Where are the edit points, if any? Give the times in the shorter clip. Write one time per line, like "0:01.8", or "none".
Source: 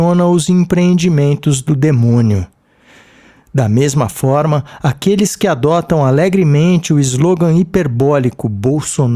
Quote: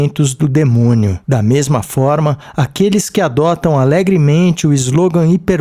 0:01.2